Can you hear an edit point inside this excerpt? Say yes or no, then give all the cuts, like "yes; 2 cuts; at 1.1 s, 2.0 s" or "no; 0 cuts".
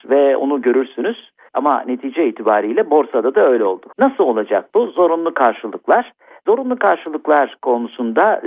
yes; 2 cuts; at 1.5 s, 3.9 s